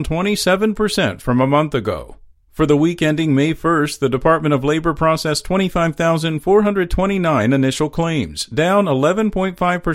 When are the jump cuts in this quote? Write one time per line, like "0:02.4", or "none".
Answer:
none